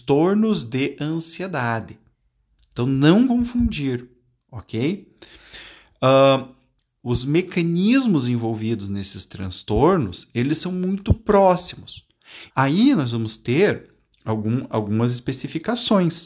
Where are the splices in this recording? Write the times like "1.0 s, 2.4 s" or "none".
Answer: 7.0 s, 12.5 s